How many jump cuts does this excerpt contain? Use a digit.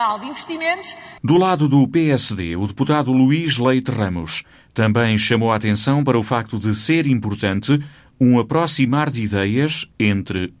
1